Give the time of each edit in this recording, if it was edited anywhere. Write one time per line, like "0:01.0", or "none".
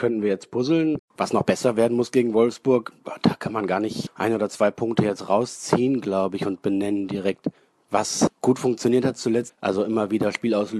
0:01.0
0:09.5